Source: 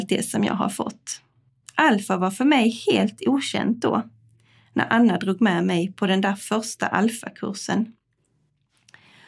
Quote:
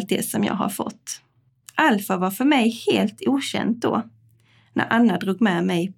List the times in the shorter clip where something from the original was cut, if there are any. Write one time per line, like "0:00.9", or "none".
none